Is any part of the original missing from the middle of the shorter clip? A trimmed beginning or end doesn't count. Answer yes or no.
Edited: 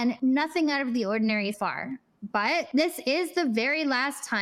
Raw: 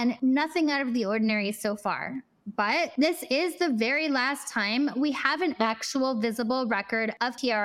yes